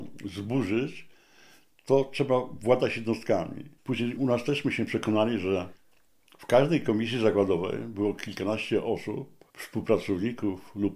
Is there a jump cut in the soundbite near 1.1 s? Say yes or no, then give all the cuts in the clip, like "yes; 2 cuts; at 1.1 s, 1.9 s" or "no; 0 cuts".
no; 2 cuts; at 3.8 s, 9.5 s